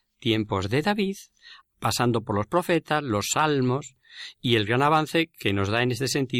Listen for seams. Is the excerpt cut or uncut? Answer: cut